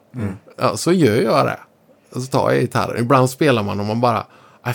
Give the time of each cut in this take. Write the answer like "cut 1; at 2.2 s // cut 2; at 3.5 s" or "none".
none